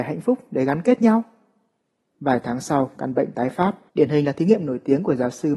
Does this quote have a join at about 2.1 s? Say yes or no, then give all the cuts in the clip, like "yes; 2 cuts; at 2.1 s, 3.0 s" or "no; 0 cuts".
yes; 2 cuts; at 2.1 s, 3.9 s